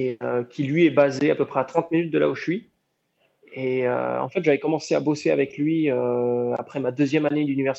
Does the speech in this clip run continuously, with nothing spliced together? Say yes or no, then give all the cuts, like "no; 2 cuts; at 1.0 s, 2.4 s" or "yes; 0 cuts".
yes; 0 cuts